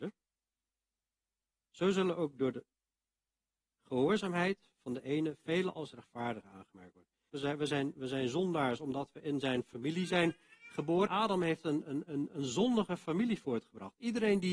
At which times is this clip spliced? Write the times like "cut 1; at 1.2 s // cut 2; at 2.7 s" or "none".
cut 1; at 7.3 s // cut 2; at 11.1 s